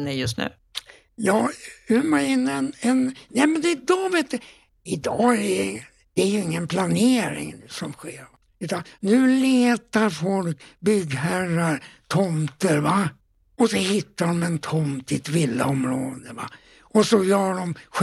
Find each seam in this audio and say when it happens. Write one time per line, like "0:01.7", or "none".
none